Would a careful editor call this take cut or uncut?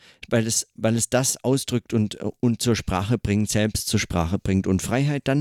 uncut